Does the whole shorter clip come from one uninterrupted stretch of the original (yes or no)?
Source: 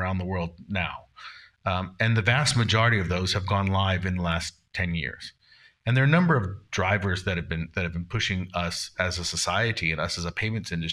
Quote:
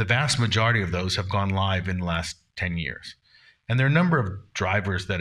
yes